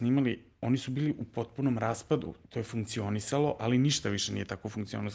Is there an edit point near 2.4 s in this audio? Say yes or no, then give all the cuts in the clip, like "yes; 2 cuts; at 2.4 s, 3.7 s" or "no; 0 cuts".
yes; 1 cut; at 2.4 s